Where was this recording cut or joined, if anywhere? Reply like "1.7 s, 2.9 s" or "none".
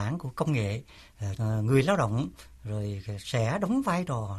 1.4 s